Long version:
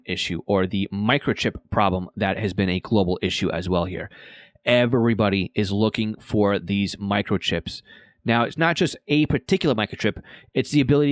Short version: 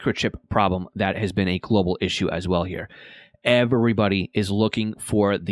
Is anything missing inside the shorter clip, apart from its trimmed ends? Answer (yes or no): no